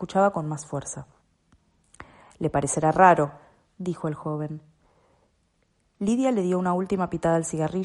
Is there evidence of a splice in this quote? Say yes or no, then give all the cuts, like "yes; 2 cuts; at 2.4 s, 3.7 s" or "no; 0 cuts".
no; 0 cuts